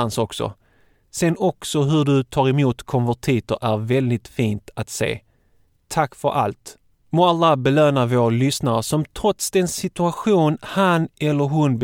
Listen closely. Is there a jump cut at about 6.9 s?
yes; 1 cut; at 6.9 s

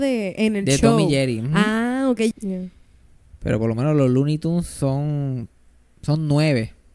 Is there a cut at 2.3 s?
yes; 1 cut; at 2.3 s

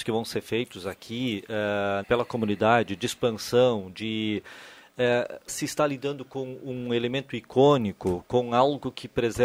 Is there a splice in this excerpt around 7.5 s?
no; 2 cuts; at 2.0 s, 5.5 s

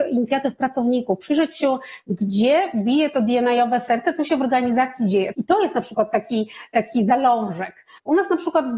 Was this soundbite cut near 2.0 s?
no; 1 cut; at 5.3 s

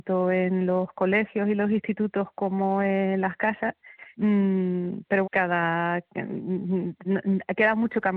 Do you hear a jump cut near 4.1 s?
yes; 2 cuts; at 4.1 s, 5.2 s

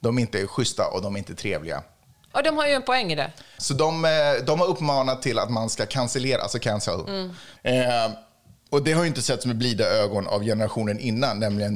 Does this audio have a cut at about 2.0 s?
no; 2 cuts; at 3.6 s, 7.6 s

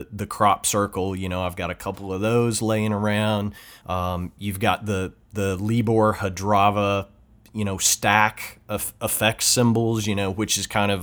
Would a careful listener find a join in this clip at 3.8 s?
yes; 1 cut; at 3.8 s

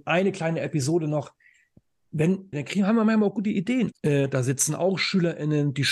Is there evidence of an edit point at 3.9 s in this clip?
yes; 2 cuts; at 2.5 s, 3.9 s

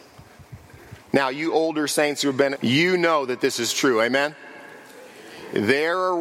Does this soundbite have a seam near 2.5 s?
yes; 2 cuts; at 1.0 s, 2.5 s

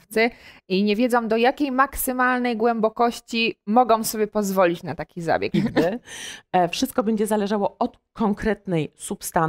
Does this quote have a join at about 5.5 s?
yes; 1 cut; at 5.5 s

